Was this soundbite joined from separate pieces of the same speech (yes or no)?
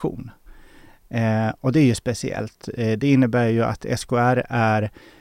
no